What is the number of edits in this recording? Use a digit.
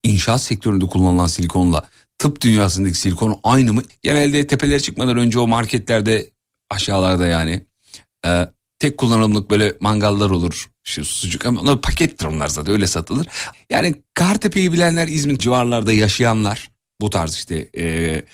3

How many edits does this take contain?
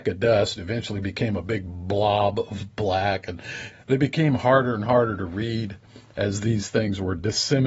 1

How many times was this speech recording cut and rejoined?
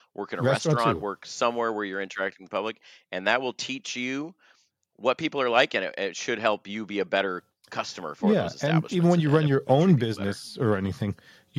0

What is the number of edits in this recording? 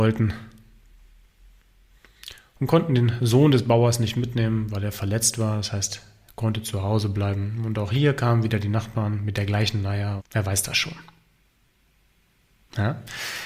1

